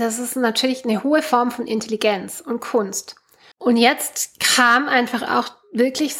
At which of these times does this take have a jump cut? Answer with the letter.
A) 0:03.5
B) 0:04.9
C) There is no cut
A